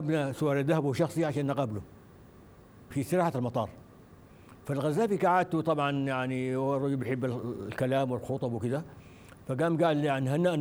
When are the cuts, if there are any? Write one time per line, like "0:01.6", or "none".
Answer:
0:02.9
0:04.6

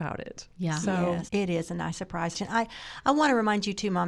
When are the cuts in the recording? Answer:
0:01.3
0:02.3

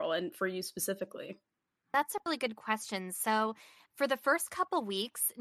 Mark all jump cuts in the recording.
none

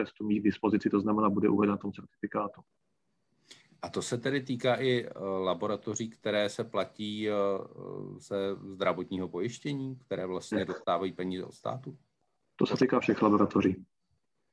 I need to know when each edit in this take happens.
none

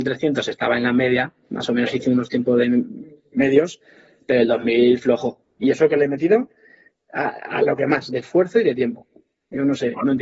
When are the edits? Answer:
0:05.4

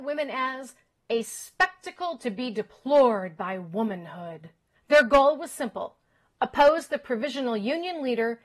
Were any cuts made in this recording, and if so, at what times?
0:04.7

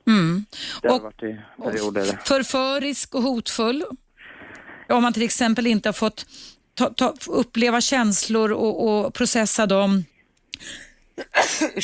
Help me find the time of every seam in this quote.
0:04.9

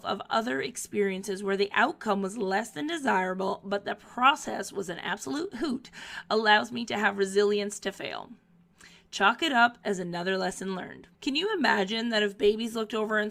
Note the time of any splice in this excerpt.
0:11.1

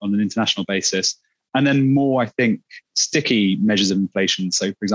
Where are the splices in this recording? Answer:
0:02.9

